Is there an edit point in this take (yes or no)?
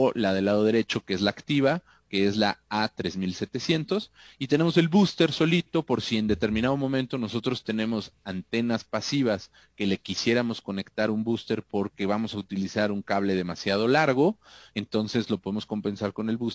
no